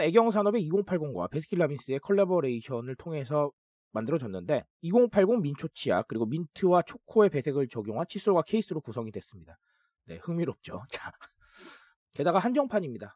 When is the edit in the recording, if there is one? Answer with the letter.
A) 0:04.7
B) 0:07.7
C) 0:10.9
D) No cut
A